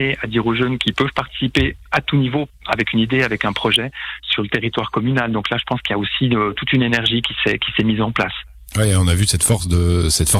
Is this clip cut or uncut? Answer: uncut